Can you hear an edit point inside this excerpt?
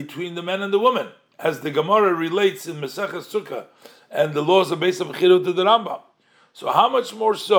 no; 0 cuts

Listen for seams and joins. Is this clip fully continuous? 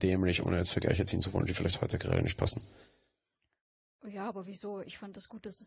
yes; 0 cuts

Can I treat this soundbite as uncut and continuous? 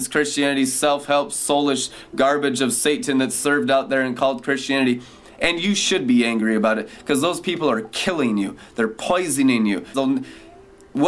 no; 1 cut; at 9.9 s

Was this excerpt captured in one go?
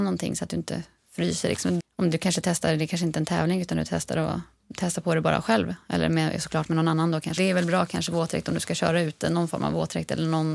no; 2 cuts; at 1.8 s, 7.4 s

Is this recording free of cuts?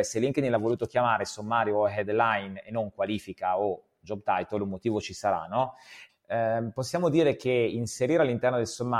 no; 1 cut; at 6.1 s

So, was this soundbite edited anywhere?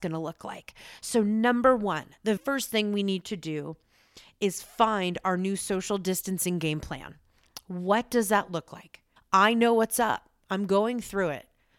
yes; 2 cuts; at 2.4 s, 9.2 s

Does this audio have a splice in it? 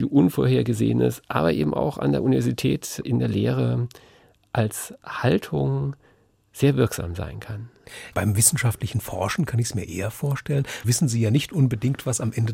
yes; 2 cuts; at 8.1 s, 10.8 s

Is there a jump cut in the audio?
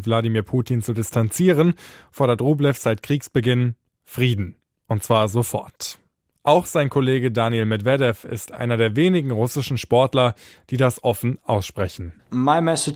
no; 0 cuts

